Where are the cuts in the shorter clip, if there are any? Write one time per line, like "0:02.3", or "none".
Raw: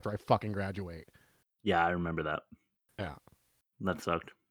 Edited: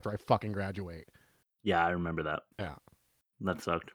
0:02.5